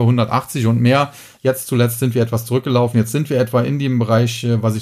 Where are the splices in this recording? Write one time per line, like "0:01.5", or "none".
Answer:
none